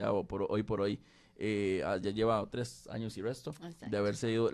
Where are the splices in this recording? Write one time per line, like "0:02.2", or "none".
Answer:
none